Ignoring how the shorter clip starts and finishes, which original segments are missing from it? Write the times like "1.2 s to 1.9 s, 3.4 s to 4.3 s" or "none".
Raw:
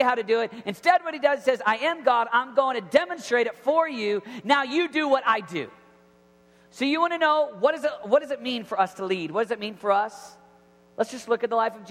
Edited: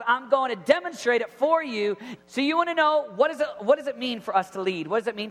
4.4 s to 6.6 s